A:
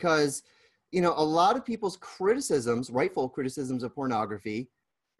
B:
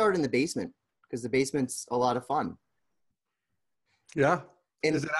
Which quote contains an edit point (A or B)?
B